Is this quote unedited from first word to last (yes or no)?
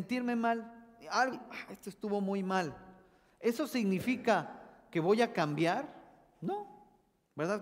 no